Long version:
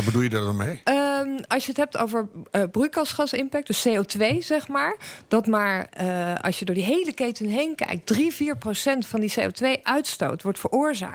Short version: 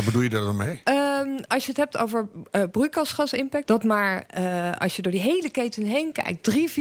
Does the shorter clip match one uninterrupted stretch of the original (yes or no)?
no